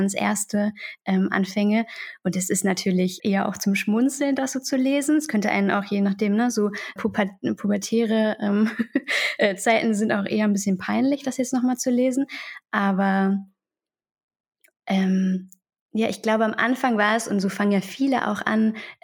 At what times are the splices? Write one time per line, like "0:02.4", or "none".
0:03.2
0:07.0